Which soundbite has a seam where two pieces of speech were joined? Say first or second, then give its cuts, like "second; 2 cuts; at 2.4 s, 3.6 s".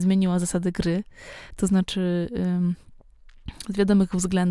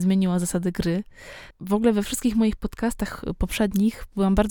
second; 1 cut; at 1.5 s